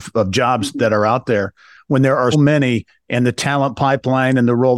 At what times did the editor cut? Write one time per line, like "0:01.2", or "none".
0:02.3